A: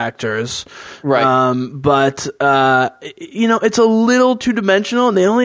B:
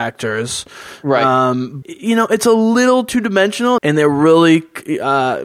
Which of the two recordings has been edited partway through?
B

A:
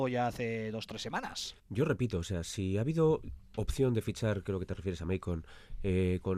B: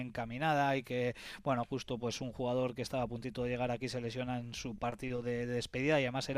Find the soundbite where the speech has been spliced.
A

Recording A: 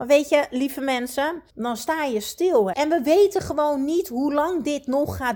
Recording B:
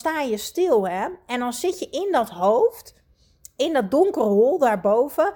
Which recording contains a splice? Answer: A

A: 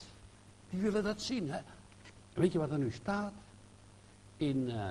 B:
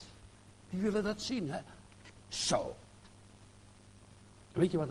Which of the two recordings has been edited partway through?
A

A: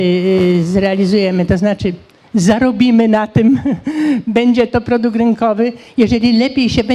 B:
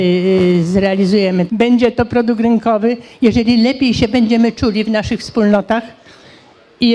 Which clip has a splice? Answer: B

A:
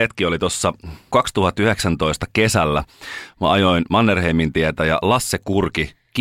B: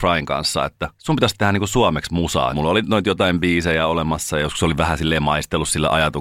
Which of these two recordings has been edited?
B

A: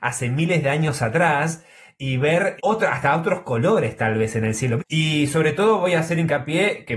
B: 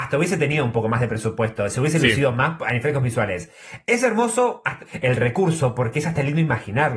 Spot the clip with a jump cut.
A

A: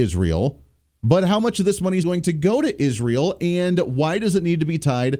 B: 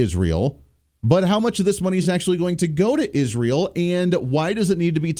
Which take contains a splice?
A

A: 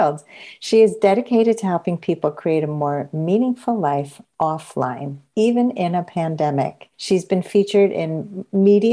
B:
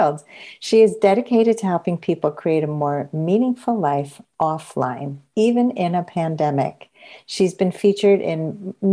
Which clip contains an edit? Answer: A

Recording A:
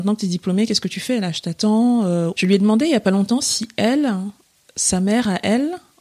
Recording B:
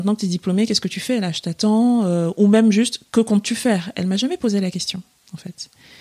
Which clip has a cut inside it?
A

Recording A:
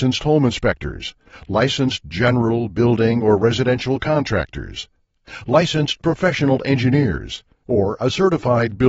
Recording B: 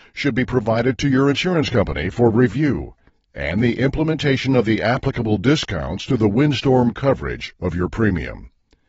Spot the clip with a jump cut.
A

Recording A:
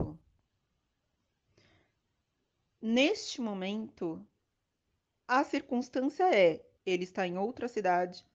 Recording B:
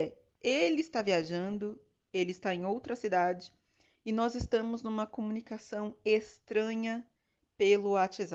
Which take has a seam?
A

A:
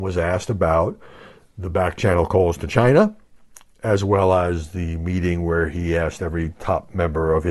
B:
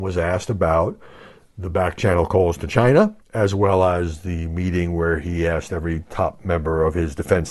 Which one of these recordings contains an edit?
B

